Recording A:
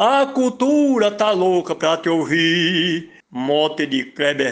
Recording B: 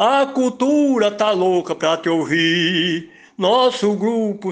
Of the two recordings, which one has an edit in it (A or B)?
A